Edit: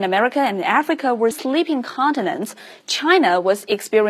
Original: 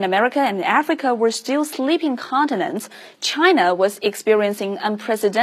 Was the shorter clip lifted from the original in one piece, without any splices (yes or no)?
no